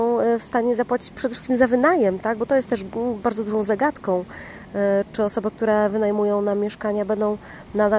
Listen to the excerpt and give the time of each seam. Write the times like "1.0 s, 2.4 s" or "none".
none